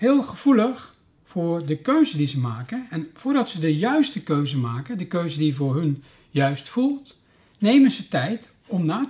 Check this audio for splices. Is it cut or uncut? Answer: uncut